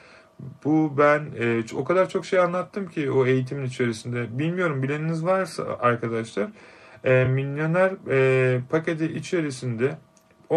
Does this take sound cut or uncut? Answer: uncut